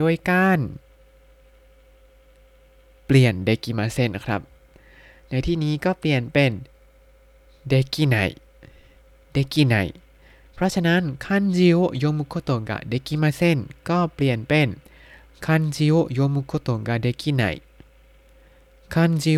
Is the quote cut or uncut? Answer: uncut